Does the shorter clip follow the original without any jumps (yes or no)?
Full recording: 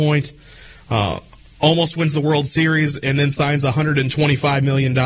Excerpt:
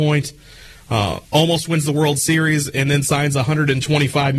no